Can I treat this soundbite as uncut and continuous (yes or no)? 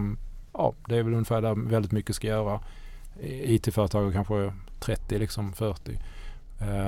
yes